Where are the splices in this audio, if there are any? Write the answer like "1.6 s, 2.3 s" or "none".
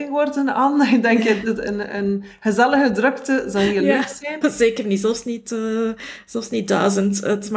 4.4 s